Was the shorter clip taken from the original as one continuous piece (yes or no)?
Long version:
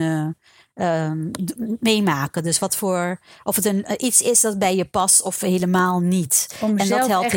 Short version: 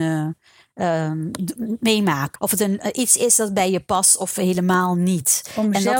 no